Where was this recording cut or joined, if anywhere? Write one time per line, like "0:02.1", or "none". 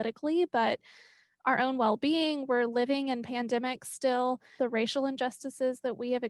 0:04.6